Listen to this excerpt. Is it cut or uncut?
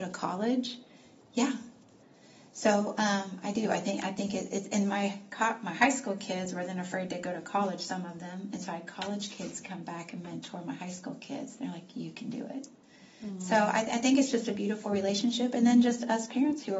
uncut